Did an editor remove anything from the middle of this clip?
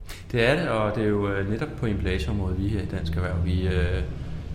no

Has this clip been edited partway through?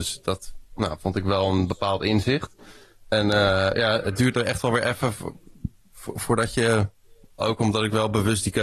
yes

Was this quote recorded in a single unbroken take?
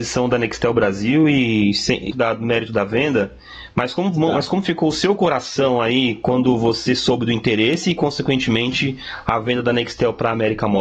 no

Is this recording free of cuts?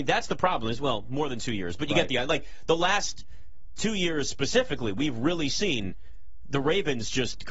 yes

